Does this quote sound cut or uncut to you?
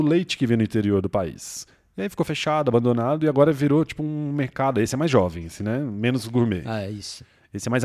uncut